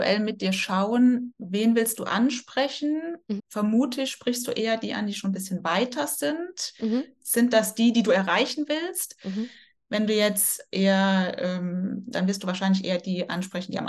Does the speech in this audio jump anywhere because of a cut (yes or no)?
yes